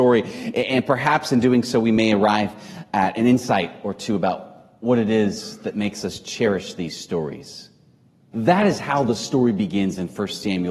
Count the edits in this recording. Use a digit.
1